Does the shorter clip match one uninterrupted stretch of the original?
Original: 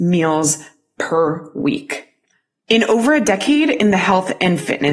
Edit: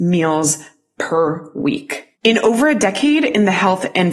no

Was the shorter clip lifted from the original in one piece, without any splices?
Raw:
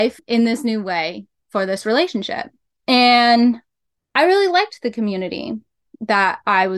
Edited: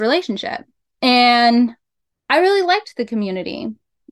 yes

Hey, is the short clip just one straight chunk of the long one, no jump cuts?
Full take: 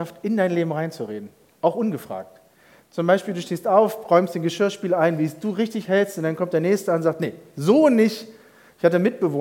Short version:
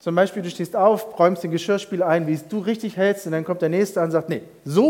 yes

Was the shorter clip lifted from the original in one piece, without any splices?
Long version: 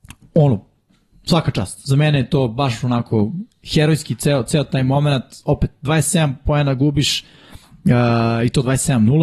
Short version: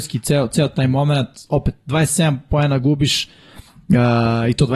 yes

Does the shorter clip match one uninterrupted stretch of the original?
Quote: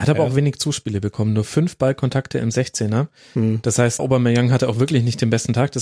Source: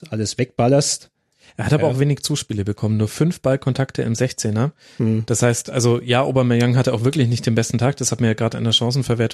no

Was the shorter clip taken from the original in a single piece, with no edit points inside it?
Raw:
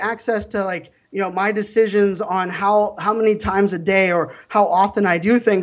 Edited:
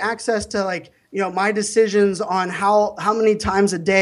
yes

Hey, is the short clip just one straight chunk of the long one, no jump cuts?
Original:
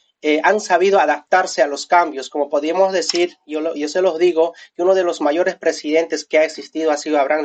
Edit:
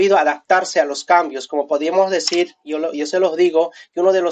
yes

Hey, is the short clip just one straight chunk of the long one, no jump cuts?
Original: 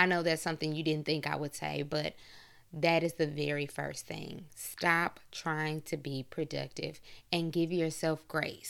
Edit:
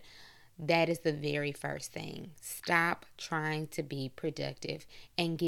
yes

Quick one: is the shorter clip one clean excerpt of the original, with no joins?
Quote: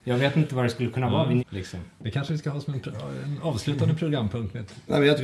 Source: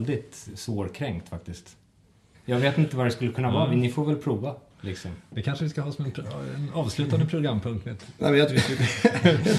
no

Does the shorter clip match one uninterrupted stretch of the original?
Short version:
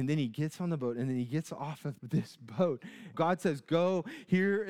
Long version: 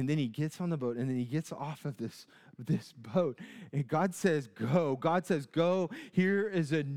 no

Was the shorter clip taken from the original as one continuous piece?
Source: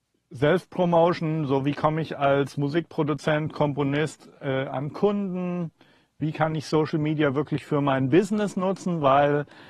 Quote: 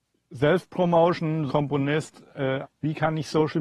no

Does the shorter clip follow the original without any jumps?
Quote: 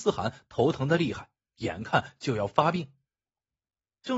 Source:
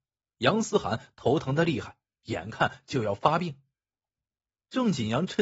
yes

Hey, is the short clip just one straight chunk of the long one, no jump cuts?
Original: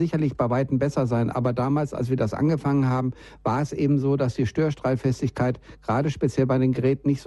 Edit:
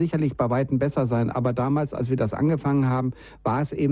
yes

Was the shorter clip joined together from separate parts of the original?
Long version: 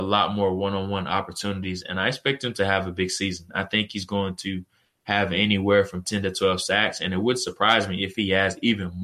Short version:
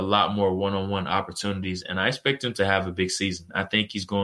no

